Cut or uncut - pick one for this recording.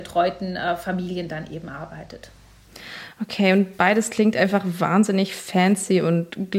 uncut